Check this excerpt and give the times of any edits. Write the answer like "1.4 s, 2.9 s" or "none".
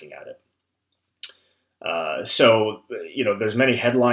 none